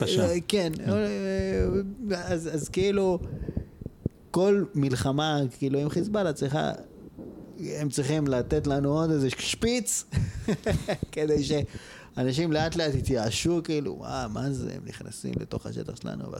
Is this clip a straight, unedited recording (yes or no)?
yes